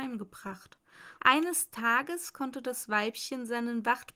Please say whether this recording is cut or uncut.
cut